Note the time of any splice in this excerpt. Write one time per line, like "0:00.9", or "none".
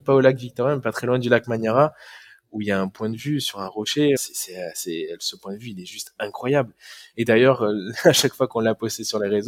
0:04.2